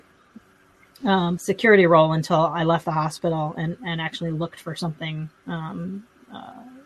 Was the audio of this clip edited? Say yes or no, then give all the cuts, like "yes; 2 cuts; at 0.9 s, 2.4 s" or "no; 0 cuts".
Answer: yes; 1 cut; at 1.4 s